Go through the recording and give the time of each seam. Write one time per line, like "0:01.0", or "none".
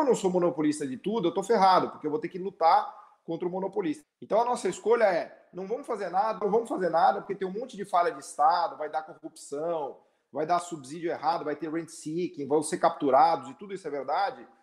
0:04.0
0:06.4

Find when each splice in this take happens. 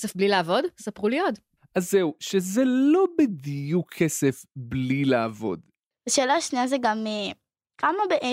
0:05.9

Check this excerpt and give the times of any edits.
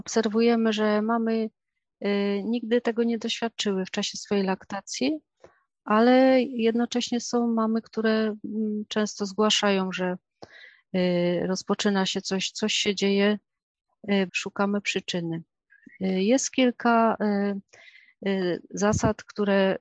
0:12.2
0:14.3

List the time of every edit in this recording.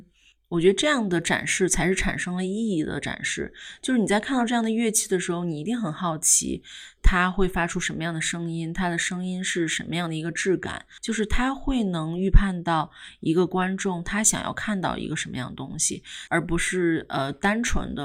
0:11.0
0:16.3

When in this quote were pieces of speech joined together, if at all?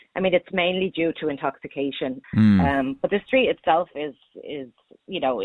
0:02.2

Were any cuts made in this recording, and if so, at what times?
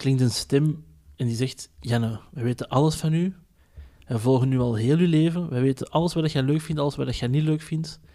none

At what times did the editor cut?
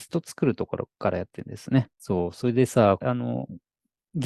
0:01.9
0:03.0

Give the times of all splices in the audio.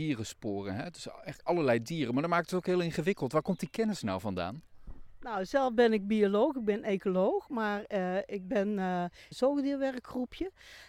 0:09.3

